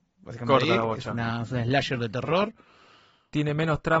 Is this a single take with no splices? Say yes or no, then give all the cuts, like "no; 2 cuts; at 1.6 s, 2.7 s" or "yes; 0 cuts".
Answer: yes; 0 cuts